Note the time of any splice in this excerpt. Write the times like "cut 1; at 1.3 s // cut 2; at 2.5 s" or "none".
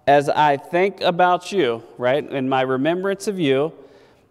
none